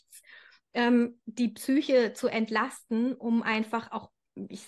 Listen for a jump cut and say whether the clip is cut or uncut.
uncut